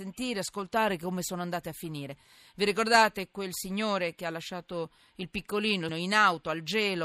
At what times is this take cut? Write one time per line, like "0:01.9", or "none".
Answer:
0:05.9

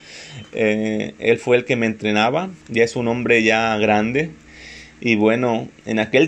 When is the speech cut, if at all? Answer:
0:02.6

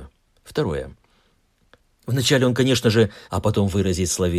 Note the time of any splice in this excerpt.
0:02.0
0:03.2

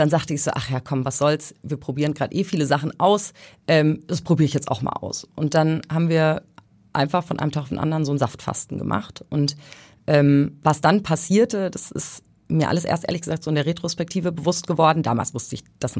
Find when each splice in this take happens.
none

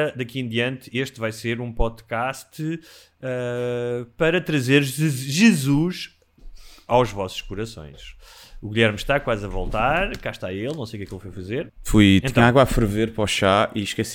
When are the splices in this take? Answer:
0:11.7

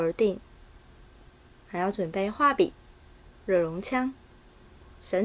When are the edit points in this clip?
0:03.3

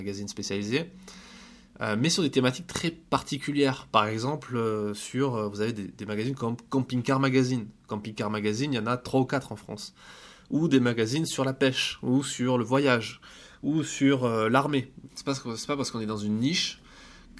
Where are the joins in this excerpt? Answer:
0:15.1

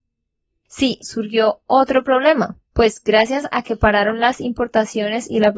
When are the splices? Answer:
0:01.0
0:02.6

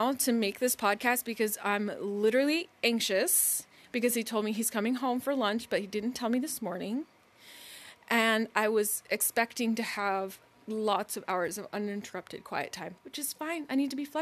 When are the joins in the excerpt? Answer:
0:13.0

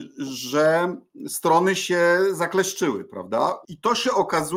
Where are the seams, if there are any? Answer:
0:03.6

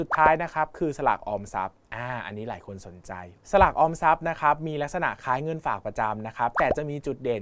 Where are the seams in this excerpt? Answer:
0:03.4

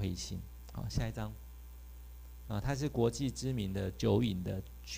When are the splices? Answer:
0:02.4

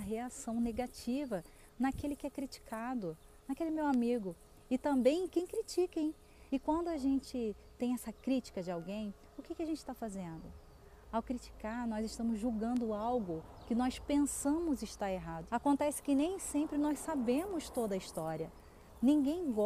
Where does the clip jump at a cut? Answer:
0:06.5
0:15.5

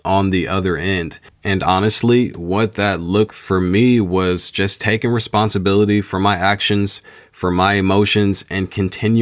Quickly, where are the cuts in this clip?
0:01.3
0:03.3

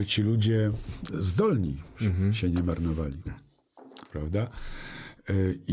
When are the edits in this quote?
0:03.3

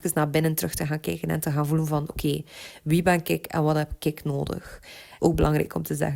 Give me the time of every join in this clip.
0:05.2

